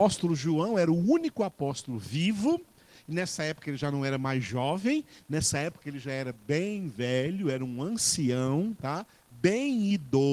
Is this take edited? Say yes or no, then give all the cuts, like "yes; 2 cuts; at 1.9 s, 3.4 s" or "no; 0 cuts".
no; 0 cuts